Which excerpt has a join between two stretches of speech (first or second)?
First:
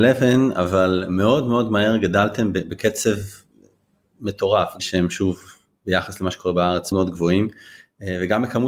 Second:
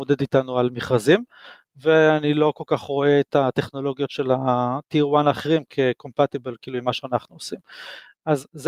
first